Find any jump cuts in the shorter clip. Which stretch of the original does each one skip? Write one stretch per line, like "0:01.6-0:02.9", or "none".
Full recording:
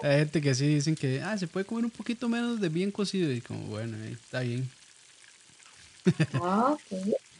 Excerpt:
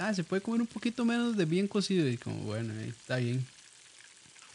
none